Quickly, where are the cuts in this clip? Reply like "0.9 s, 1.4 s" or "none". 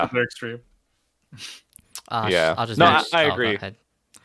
none